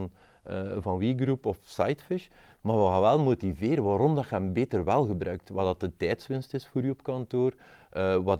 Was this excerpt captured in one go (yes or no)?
yes